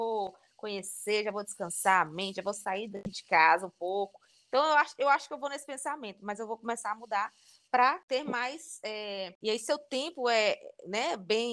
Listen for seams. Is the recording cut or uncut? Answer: uncut